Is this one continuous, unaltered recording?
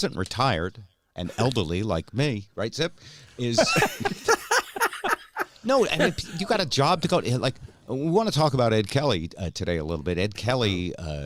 yes; 0 cuts

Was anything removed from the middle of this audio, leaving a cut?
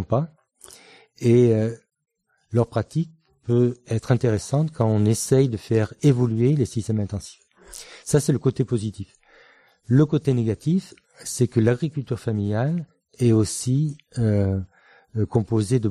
no; 0 cuts

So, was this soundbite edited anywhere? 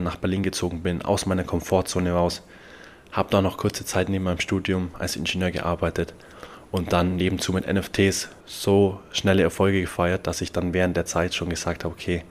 yes; 1 cut; at 8.4 s

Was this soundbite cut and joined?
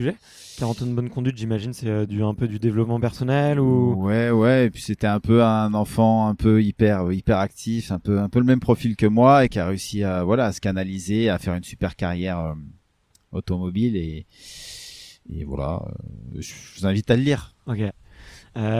no; 0 cuts

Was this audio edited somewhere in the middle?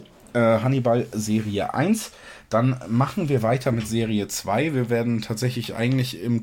no; 0 cuts

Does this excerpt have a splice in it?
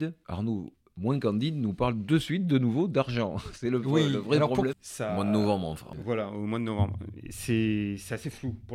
yes; 1 cut; at 4.7 s

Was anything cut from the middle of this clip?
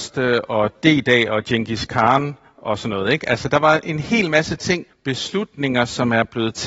yes; 1 cut; at 4.9 s

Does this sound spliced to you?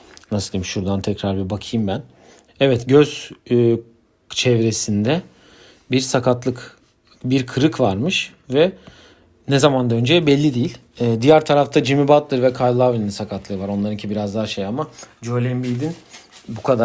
yes; 1 cut; at 2.5 s

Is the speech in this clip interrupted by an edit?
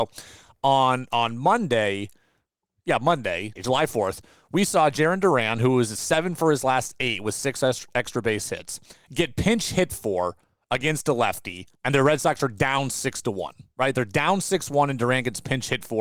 yes; 2 cuts; at 3.6 s, 11.8 s

